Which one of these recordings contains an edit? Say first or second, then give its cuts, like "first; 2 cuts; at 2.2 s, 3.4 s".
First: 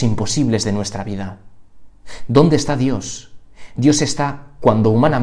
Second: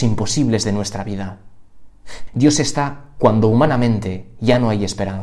second; 1 cut; at 2.3 s